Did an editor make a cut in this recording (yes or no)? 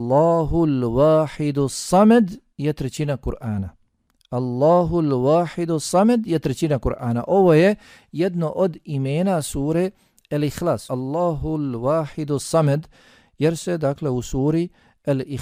yes